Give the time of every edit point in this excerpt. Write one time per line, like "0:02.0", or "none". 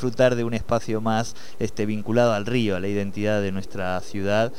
none